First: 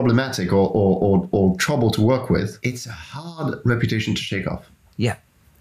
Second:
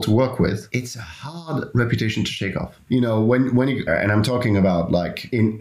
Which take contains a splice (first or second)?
second